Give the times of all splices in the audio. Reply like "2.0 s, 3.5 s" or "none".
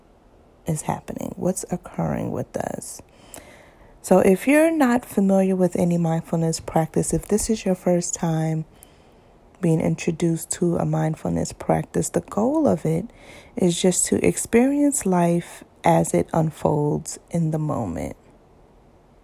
none

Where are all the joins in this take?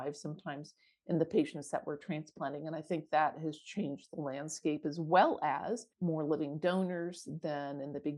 5.9 s

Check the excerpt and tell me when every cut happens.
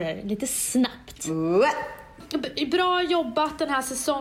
none

